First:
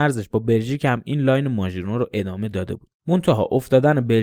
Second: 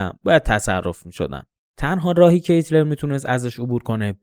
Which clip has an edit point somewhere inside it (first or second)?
second